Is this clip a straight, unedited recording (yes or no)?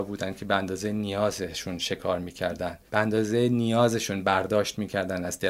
no